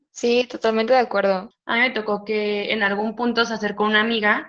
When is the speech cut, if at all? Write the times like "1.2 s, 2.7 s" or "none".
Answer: 1.5 s